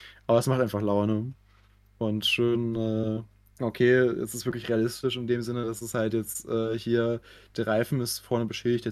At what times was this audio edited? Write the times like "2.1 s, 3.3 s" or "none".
3.6 s